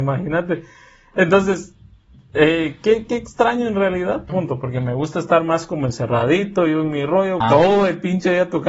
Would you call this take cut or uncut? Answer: cut